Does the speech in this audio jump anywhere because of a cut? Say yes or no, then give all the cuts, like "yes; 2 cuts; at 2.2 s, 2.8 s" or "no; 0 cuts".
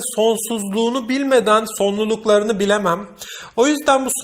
no; 0 cuts